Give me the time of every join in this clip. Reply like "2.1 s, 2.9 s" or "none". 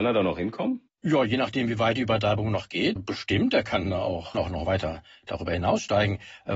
3.0 s, 4.3 s